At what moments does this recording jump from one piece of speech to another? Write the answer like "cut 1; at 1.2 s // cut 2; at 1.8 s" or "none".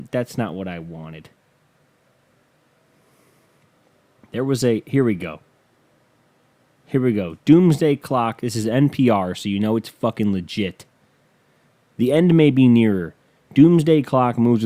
none